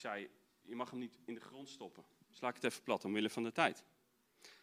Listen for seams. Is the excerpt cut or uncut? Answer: cut